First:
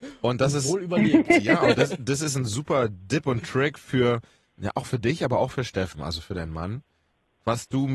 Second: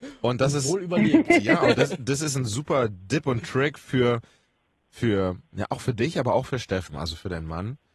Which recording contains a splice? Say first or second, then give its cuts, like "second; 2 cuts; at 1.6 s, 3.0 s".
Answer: first; 1 cut; at 4.5 s